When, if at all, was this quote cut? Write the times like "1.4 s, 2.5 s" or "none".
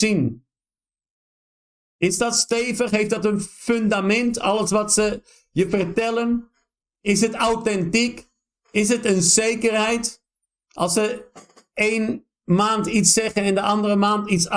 none